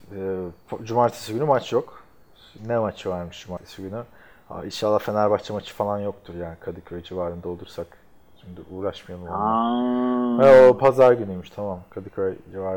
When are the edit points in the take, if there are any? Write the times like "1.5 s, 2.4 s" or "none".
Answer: 2.6 s